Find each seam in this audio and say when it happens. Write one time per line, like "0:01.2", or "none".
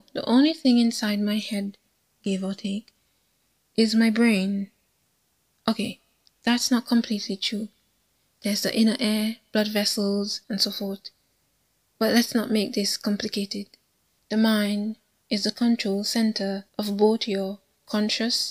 0:10.4
0:14.2
0:16.7